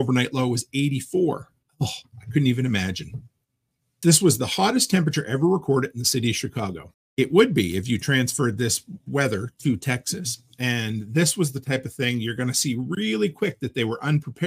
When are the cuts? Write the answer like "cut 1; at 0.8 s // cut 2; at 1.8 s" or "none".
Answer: cut 1; at 4.0 s // cut 2; at 6.9 s